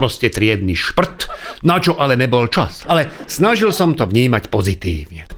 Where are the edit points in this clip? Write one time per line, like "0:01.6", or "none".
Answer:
0:01.5
0:02.8